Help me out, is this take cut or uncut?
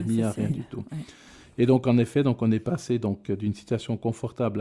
uncut